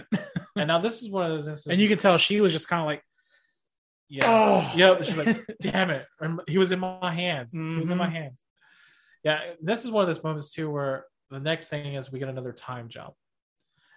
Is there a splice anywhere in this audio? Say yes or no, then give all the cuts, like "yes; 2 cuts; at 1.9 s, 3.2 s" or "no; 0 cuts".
no; 0 cuts